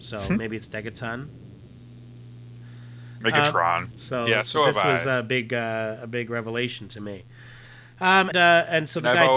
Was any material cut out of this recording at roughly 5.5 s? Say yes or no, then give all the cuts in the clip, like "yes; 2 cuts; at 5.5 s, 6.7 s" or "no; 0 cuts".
no; 2 cuts; at 3.9 s, 8.3 s